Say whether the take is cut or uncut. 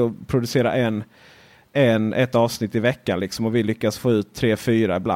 uncut